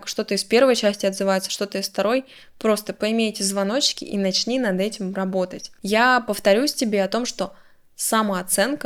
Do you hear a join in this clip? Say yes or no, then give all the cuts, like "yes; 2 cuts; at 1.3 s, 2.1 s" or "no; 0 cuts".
no; 0 cuts